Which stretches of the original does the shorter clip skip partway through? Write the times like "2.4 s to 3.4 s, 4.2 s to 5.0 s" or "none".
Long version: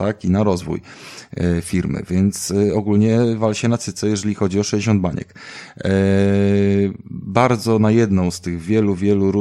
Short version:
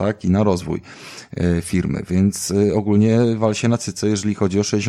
none